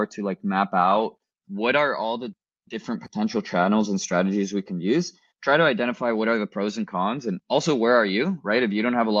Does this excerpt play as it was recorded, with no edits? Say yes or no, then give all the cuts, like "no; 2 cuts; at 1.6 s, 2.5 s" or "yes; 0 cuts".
yes; 0 cuts